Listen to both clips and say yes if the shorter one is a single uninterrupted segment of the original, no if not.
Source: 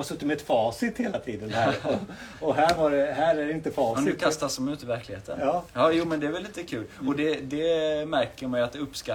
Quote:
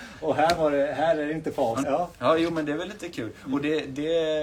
no